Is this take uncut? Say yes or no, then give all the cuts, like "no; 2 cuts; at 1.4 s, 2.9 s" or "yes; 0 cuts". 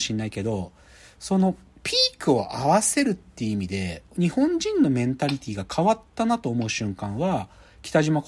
yes; 0 cuts